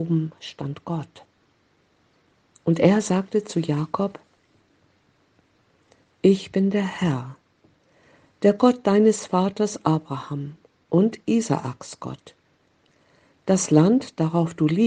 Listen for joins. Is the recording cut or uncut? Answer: uncut